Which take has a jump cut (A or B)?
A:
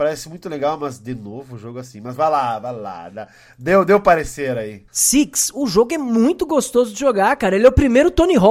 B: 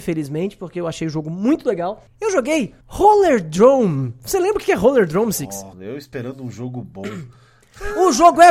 A